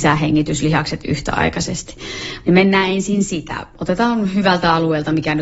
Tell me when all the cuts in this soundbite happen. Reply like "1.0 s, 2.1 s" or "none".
2.4 s